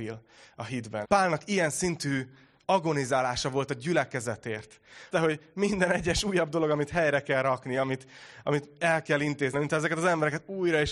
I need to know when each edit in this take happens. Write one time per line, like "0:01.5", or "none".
0:01.0
0:05.1
0:09.5

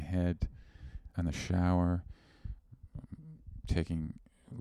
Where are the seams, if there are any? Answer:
0:01.1

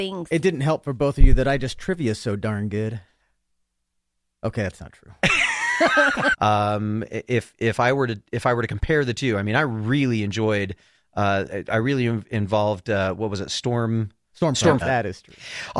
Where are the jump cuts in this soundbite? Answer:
0:06.3
0:07.6
0:14.8

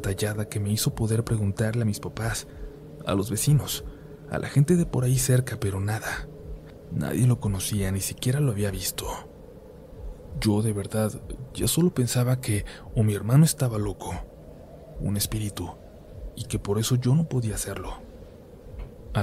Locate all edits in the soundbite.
0:14.9

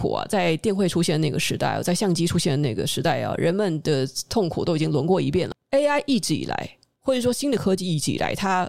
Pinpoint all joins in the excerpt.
0:05.5

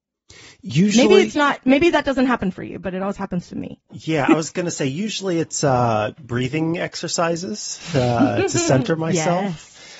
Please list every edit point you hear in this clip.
none

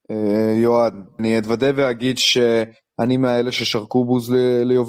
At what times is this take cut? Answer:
0:01.2

